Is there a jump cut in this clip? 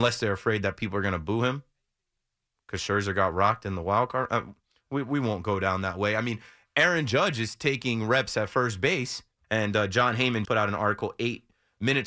yes; 2 cuts; at 9.4 s, 10.5 s

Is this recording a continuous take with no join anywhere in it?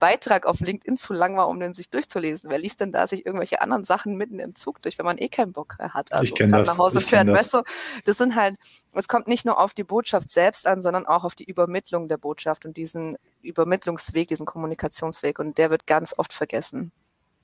no; 1 cut; at 15.8 s

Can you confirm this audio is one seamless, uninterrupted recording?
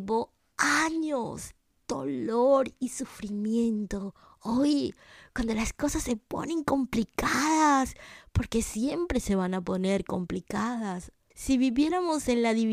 no; 1 cut; at 11.3 s

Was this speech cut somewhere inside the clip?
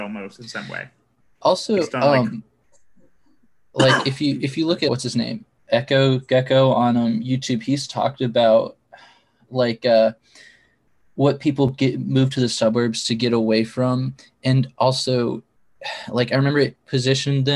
yes; 1 cut; at 4.9 s

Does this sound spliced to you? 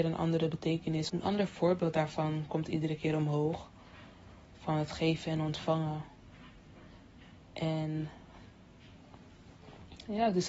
yes; 1 cut; at 1.1 s

